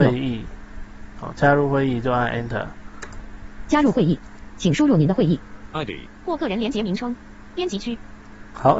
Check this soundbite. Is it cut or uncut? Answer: cut